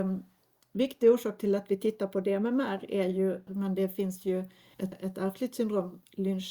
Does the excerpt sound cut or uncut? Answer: cut